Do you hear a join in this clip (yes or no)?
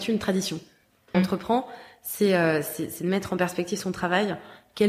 yes